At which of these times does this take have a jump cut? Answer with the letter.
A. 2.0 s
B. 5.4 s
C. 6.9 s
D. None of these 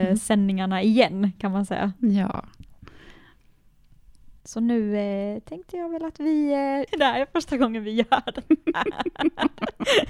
C